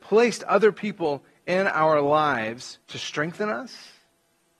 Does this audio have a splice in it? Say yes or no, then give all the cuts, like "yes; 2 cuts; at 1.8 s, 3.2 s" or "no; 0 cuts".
yes; 1 cut; at 2.8 s